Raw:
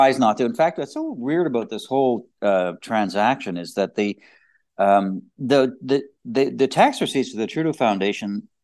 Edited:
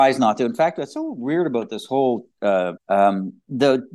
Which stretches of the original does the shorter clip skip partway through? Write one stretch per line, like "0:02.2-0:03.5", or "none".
0:02.8-0:04.7